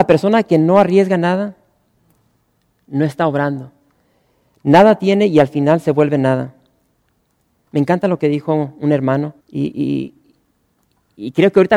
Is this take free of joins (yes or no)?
no